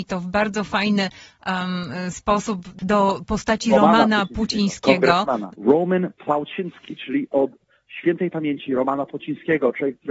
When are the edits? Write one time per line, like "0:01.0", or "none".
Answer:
0:05.5